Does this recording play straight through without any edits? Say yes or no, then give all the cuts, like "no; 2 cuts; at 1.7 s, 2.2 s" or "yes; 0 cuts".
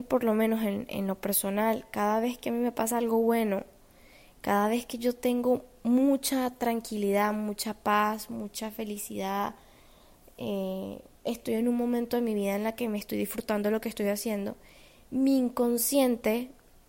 yes; 0 cuts